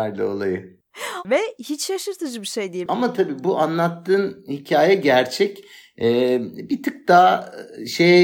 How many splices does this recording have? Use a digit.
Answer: 2